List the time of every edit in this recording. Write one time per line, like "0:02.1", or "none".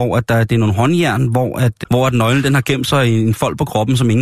0:01.8